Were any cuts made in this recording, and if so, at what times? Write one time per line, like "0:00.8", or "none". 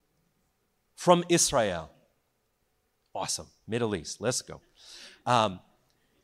none